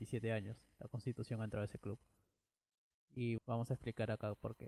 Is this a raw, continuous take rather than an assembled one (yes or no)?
no